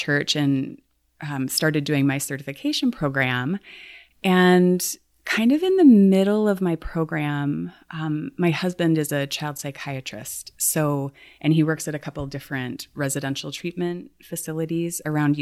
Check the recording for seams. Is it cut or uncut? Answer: uncut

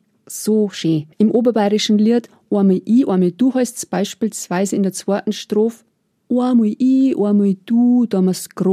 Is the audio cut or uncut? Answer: cut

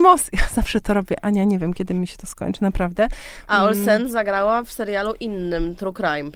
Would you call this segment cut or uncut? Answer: uncut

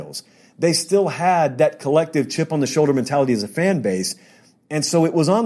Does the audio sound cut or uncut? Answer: uncut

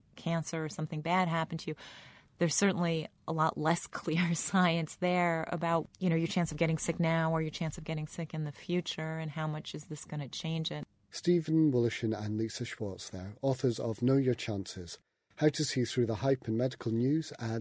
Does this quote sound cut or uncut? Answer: uncut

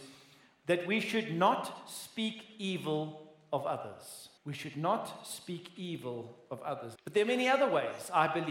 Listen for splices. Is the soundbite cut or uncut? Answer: cut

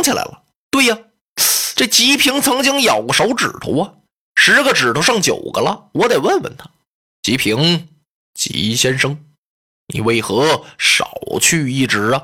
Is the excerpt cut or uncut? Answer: uncut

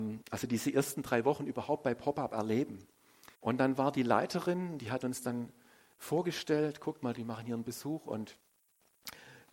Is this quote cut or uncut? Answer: cut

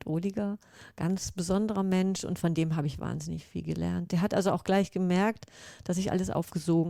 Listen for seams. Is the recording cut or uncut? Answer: uncut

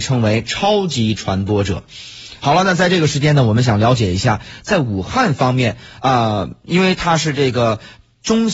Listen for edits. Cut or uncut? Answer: uncut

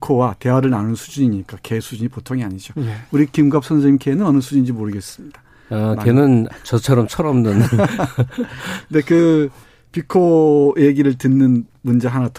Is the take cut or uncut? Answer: uncut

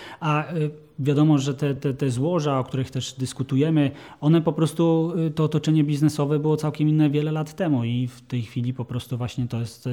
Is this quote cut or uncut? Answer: uncut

